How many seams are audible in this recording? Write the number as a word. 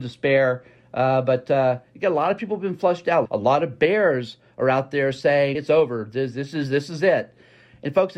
two